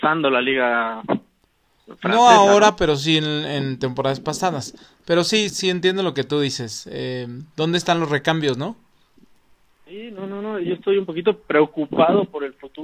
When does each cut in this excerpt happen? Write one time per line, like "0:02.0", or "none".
0:05.5